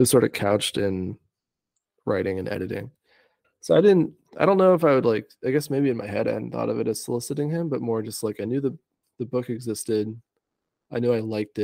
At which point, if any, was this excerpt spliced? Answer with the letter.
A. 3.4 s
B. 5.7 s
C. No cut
A